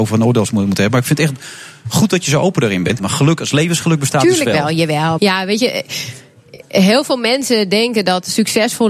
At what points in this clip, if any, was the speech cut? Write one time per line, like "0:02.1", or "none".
0:03.0
0:05.2